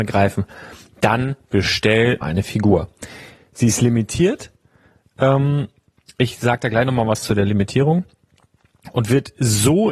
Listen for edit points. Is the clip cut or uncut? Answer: cut